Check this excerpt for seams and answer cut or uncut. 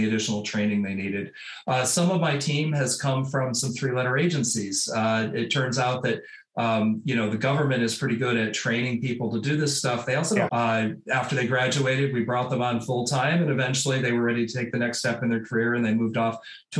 cut